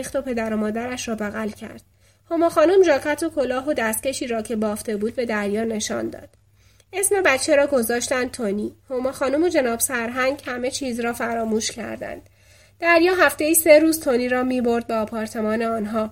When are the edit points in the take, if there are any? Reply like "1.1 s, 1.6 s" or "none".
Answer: none